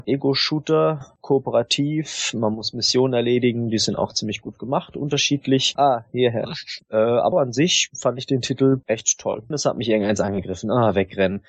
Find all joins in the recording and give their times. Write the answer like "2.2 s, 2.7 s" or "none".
5.8 s, 7.3 s, 9.5 s